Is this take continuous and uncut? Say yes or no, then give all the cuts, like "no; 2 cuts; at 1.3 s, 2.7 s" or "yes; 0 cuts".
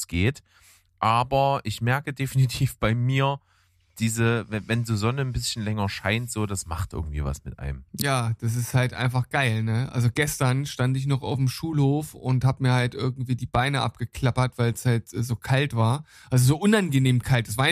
yes; 0 cuts